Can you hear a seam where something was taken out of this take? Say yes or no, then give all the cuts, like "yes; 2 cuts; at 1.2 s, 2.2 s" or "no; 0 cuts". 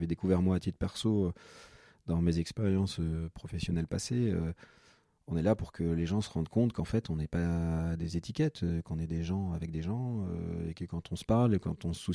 no; 0 cuts